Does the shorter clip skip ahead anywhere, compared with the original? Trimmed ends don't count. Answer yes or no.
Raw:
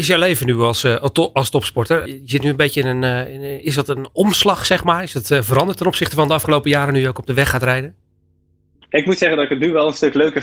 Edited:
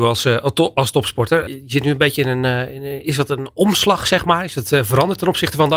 no